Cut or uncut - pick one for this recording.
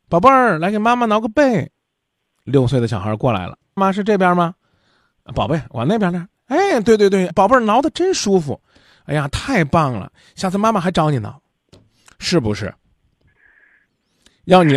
cut